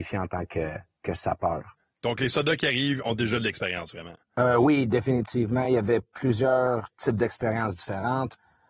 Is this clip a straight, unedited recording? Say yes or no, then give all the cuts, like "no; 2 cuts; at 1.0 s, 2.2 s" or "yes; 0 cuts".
yes; 0 cuts